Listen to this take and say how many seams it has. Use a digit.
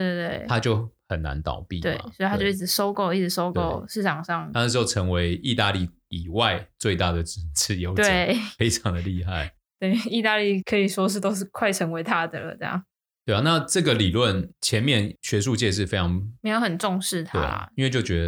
0